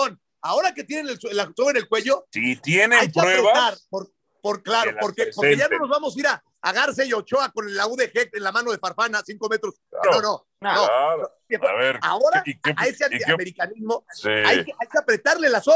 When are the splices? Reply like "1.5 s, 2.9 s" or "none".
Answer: 10.0 s, 11.5 s, 12.6 s